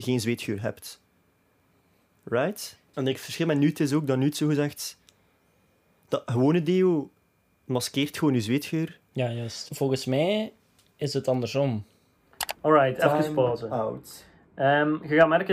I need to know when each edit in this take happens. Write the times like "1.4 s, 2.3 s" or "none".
2.9 s, 9.7 s